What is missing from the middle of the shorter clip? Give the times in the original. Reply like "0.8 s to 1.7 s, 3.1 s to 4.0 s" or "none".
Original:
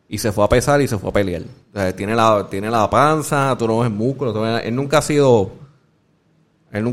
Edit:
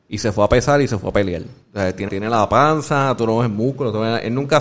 2.1 s to 2.5 s